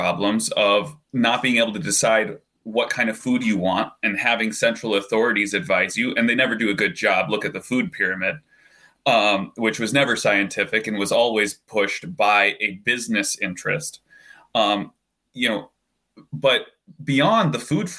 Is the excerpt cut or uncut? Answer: uncut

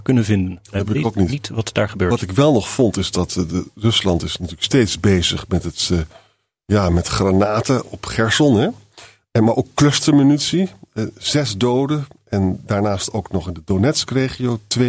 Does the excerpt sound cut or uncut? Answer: uncut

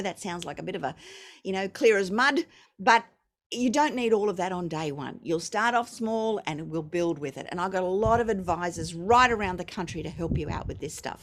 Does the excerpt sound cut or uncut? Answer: uncut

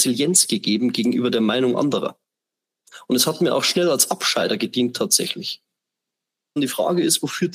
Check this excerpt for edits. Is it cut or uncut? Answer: cut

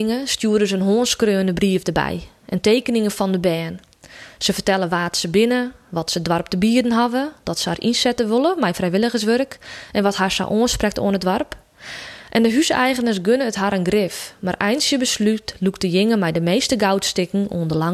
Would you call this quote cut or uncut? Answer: uncut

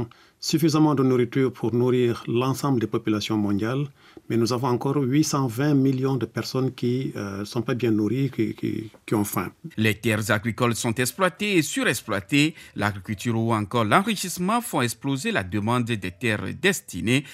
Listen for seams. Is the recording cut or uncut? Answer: cut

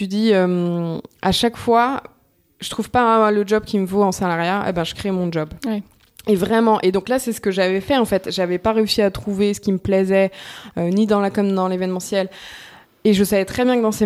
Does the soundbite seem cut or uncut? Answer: uncut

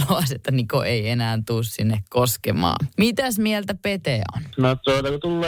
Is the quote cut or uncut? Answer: uncut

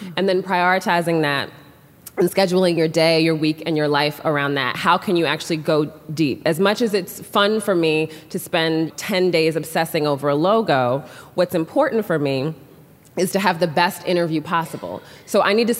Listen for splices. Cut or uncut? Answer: cut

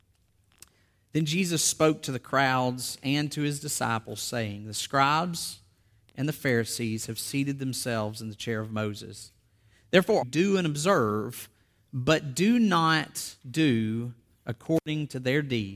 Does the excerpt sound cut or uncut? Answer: cut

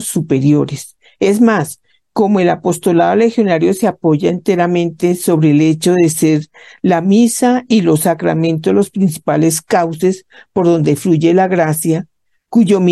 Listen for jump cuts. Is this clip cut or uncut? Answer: uncut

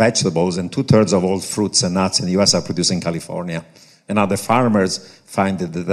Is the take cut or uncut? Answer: uncut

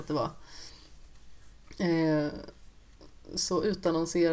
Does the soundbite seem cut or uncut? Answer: uncut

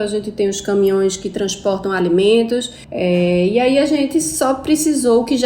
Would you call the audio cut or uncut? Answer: cut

